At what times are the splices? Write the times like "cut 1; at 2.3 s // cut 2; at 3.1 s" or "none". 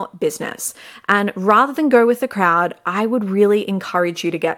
none